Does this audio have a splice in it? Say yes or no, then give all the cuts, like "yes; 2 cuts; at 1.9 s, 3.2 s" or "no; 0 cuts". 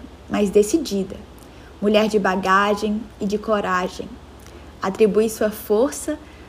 no; 0 cuts